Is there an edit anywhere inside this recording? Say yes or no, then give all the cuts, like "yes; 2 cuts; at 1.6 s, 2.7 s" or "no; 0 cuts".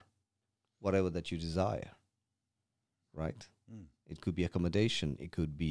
no; 0 cuts